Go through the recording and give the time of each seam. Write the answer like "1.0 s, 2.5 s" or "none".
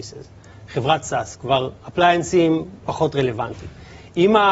2.8 s